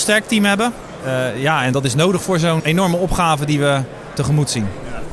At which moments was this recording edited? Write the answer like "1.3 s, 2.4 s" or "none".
2.6 s